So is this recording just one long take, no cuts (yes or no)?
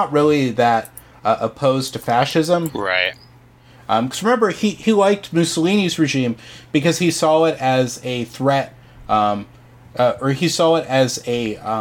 no